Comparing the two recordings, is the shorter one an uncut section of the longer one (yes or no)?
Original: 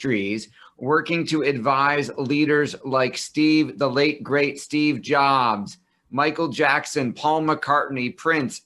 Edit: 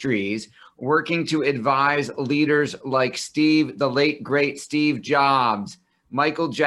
yes